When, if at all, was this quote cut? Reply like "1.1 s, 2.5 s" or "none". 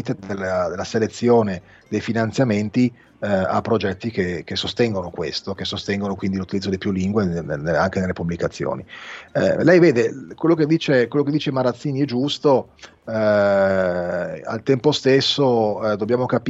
7.4 s